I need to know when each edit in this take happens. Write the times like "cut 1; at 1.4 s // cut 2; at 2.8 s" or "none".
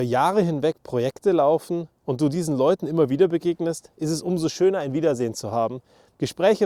none